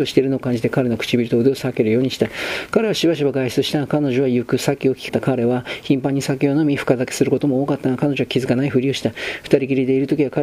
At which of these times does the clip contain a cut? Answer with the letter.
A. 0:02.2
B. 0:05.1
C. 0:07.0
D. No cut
B